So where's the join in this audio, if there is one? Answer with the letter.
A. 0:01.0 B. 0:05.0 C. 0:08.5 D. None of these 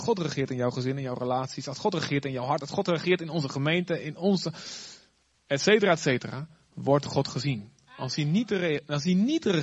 D